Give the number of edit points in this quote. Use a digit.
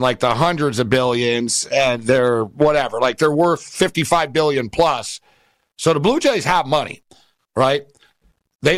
0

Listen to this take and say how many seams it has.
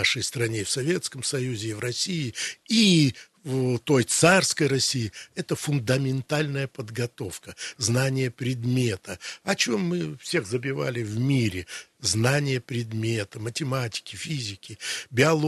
0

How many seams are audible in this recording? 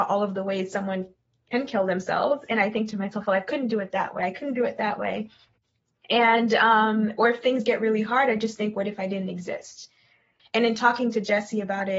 1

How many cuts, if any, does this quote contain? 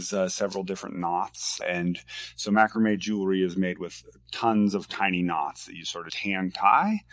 2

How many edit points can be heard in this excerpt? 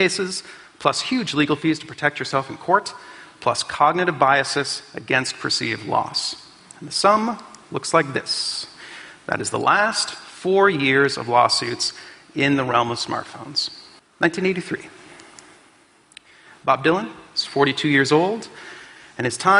1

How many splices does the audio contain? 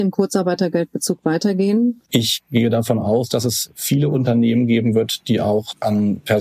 1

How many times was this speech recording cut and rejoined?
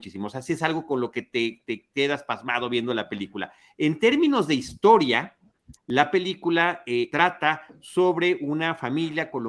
2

